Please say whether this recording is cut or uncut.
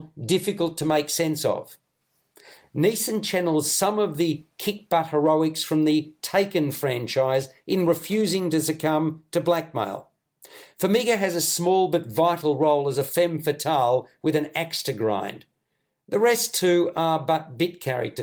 uncut